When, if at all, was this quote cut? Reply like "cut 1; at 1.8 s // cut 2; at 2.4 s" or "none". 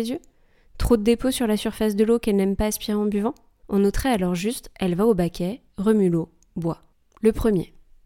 cut 1; at 5.7 s // cut 2; at 7.1 s